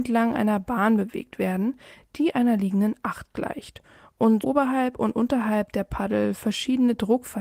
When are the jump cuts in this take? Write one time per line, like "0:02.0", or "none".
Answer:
0:04.4